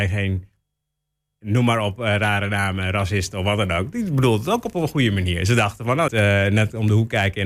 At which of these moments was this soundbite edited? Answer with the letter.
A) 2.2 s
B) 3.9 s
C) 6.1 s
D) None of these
C